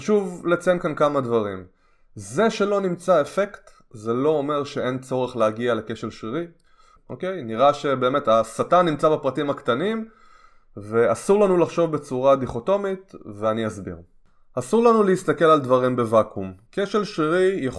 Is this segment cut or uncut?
cut